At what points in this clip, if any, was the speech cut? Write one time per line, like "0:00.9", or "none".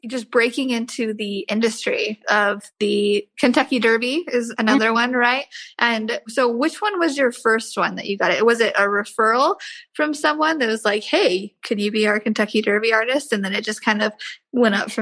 none